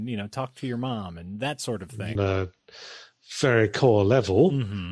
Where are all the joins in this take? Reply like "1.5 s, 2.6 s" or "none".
2.1 s